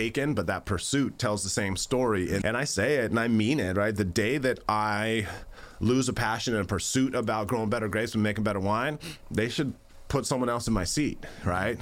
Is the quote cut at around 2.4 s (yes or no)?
yes